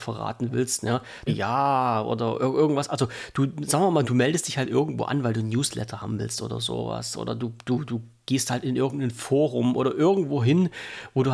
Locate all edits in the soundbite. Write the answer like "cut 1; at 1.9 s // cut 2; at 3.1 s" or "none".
cut 1; at 1.3 s // cut 2; at 4.0 s

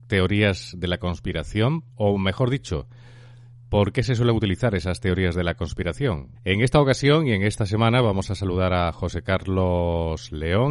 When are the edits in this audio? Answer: cut 1; at 1.9 s // cut 2; at 6.3 s

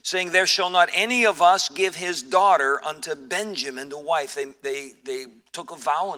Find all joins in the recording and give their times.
none

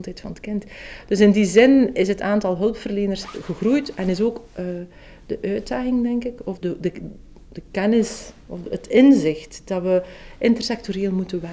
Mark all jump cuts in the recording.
cut 1; at 6.6 s

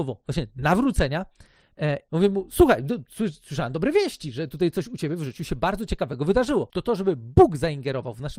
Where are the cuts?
cut 1; at 2.1 s // cut 2; at 6.7 s

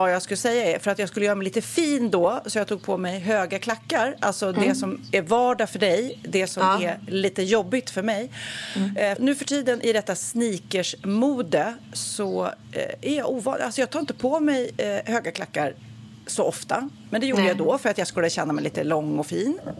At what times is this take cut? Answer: cut 1; at 9.2 s

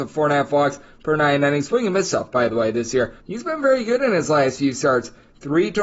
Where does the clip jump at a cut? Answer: cut 1; at 3.2 s

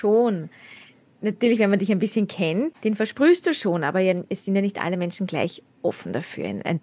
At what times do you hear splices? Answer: cut 1; at 2.7 s

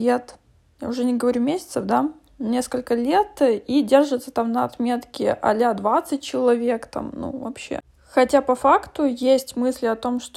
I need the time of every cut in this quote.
none

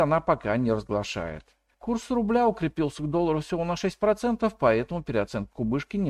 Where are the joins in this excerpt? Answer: cut 1; at 1.7 s

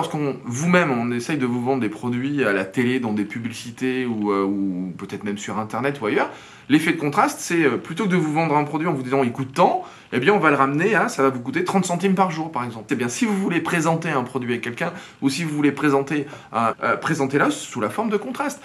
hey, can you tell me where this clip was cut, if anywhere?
cut 1; at 12.9 s // cut 2; at 16.7 s

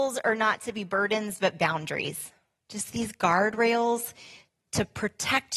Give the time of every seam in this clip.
none

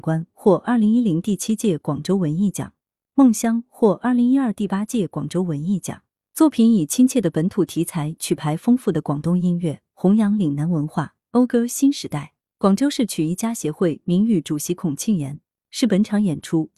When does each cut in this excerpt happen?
none

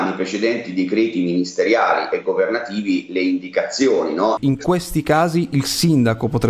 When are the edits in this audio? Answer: cut 1; at 4.4 s

